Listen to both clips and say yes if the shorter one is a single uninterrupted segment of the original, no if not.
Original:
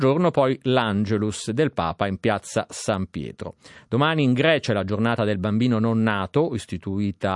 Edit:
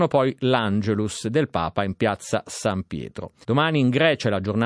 no